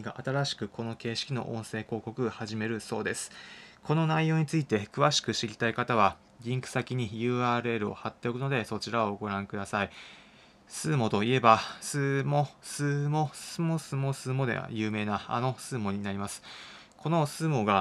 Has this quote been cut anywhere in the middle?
no; 0 cuts

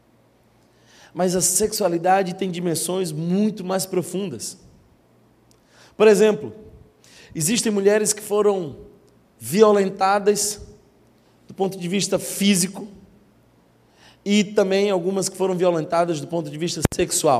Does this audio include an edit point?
no; 0 cuts

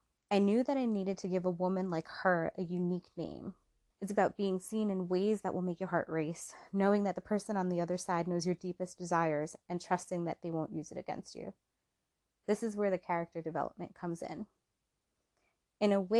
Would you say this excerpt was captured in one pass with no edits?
no; 1 cut; at 3.9 s

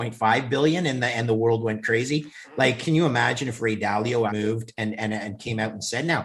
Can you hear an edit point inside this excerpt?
yes; 1 cut; at 4.3 s

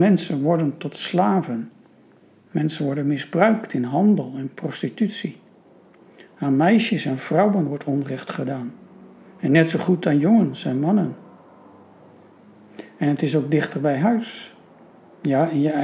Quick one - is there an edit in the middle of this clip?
no; 0 cuts

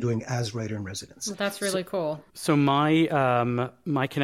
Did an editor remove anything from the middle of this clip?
yes; 1 cut; at 2.3 s

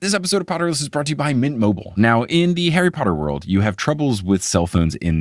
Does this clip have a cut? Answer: no; 0 cuts

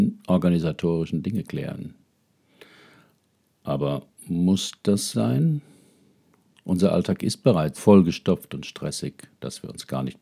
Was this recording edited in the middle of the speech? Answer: yes; 2 cuts; at 5.1 s, 7.8 s

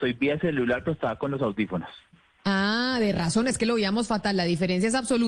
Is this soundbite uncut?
yes; 0 cuts

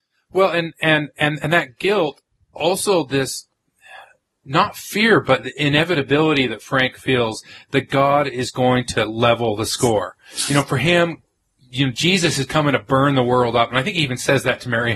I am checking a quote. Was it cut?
no; 0 cuts

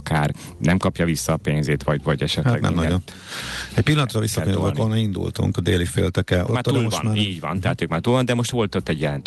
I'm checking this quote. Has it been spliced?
yes; 2 cuts; at 3.1 s, 6.5 s

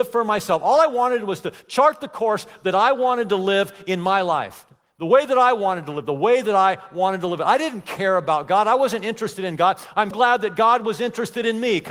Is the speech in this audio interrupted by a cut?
yes; 1 cut; at 10.1 s

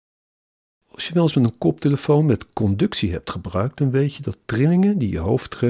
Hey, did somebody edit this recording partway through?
no; 0 cuts

